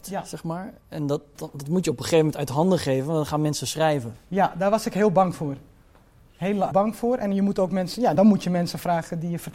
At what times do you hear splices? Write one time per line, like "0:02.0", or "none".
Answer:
0:01.4
0:06.7
0:08.2